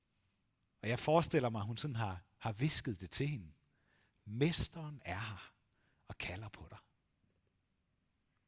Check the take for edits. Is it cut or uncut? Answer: cut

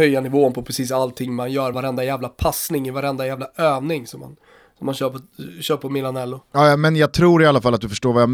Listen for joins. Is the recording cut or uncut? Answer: uncut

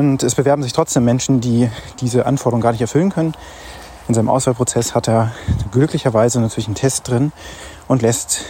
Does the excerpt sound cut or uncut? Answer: uncut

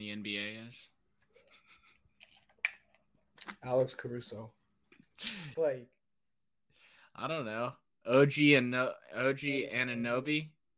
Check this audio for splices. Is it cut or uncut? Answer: cut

